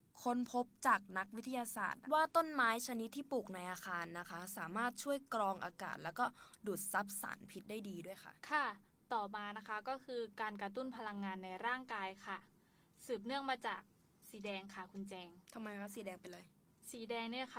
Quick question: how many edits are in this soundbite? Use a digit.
0